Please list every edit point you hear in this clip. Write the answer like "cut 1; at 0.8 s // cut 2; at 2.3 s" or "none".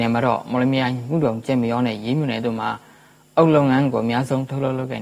none